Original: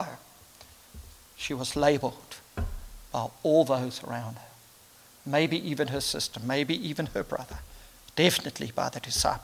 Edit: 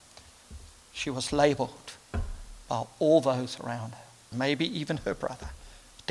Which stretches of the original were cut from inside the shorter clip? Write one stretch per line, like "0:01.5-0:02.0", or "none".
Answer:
0:04.8-0:06.4

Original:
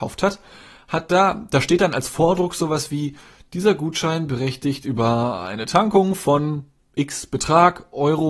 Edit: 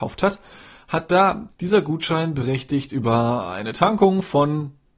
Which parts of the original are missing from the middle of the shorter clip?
0:01.5-0:03.4

